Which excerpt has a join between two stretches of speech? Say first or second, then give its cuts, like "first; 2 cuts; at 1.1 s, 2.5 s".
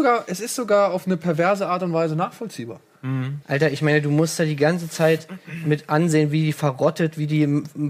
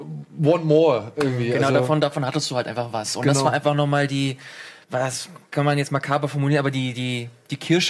first; 1 cut; at 3.4 s